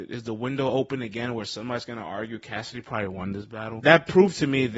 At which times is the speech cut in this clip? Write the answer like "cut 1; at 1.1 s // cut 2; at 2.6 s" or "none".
cut 1; at 3.8 s